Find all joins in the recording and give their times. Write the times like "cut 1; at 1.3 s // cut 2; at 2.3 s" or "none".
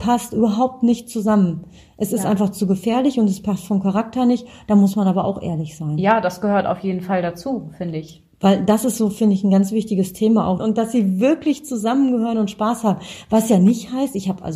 cut 1; at 10.6 s